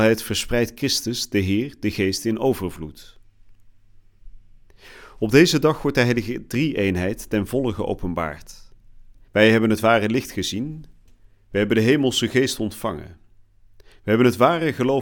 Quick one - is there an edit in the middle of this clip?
yes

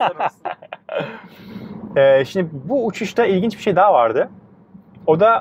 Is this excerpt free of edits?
yes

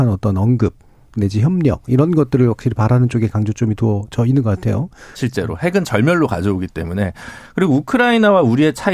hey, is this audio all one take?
no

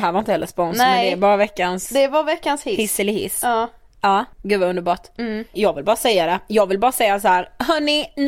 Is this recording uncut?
no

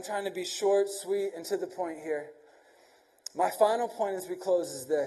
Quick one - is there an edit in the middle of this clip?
no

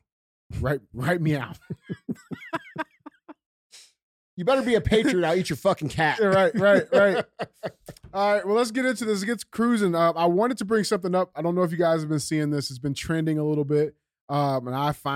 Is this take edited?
no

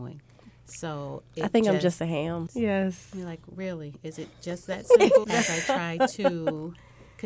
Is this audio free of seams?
no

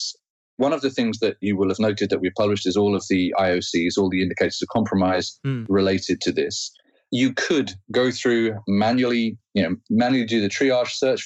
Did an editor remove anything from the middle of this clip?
no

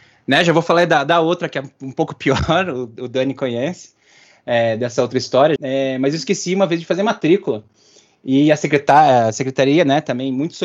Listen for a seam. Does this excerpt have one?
yes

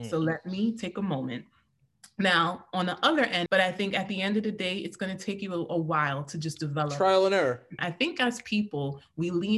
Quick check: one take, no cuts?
no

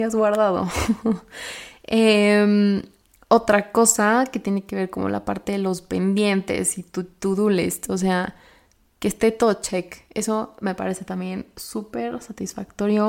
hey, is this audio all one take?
yes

